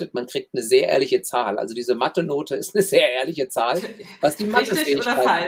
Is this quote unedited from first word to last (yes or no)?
yes